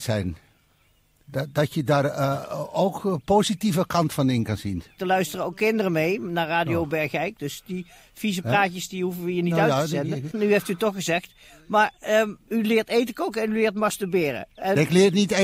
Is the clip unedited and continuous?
no; 2 cuts; at 5.0 s, 10.3 s

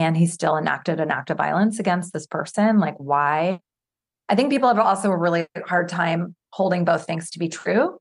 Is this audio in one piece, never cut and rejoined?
yes; 0 cuts

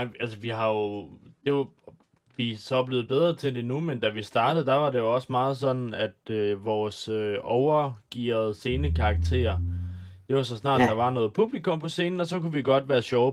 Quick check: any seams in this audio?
no; 0 cuts

